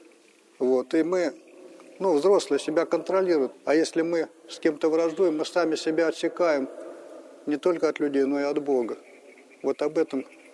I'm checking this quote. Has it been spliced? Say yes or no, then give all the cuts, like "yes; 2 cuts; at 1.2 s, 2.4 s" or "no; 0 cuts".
yes; 1 cut; at 3.5 s